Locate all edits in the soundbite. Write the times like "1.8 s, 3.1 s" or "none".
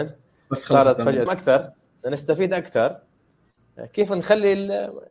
1.3 s